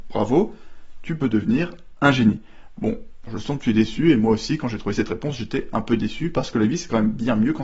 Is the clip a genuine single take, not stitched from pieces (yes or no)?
no